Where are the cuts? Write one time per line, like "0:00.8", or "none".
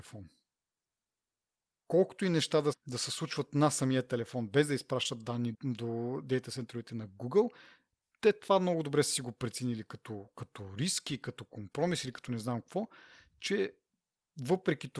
0:02.7
0:05.5